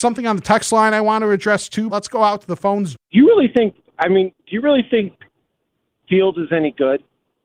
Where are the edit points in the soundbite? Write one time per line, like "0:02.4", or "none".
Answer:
0:01.9
0:03.0

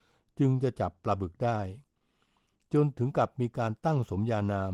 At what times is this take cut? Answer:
none

